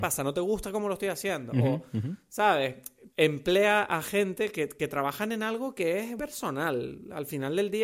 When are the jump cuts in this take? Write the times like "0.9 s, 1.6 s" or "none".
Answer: 3.1 s, 6.2 s